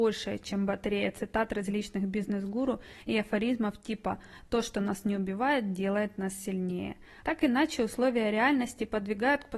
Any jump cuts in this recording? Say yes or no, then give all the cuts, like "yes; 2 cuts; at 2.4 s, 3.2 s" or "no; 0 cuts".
yes; 1 cut; at 7.2 s